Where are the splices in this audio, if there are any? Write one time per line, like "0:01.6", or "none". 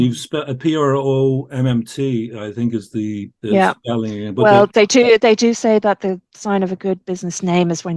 0:03.4